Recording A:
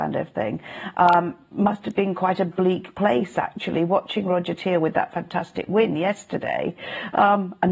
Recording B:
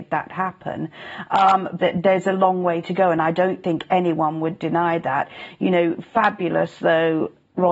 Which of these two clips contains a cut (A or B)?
B